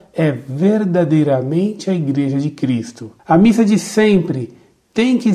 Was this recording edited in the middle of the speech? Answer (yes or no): yes